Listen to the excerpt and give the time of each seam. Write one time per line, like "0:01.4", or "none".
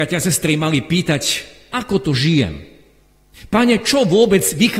0:01.7